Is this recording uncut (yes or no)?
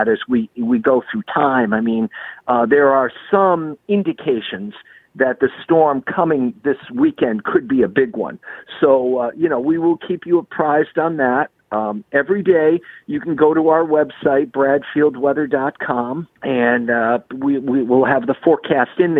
no